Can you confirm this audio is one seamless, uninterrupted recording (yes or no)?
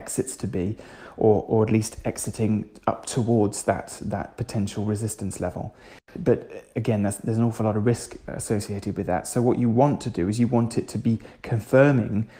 no